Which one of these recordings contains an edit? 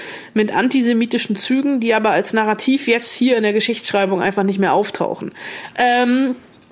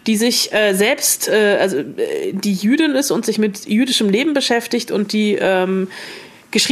first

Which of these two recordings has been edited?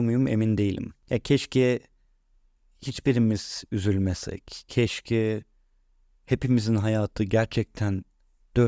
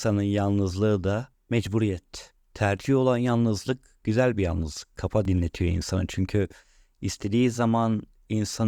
second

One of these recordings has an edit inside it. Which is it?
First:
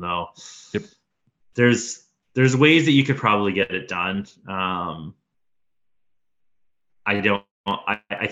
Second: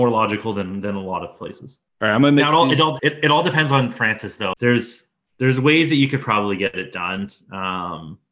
second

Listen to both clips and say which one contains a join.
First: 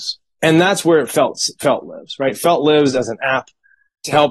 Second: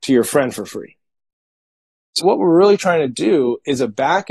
second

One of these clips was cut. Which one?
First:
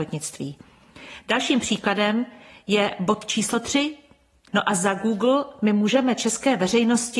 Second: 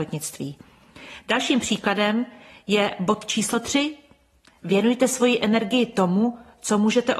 first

